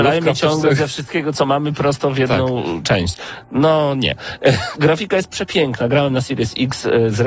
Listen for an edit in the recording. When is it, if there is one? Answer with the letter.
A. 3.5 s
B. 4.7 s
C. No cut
B